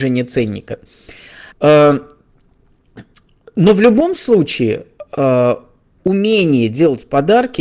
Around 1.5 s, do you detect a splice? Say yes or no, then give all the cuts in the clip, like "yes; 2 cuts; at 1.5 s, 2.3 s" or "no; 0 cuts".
yes; 1 cut; at 1.5 s